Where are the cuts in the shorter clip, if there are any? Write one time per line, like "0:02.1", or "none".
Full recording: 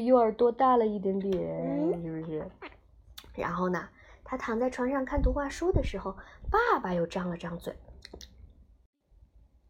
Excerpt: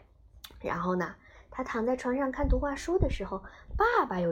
none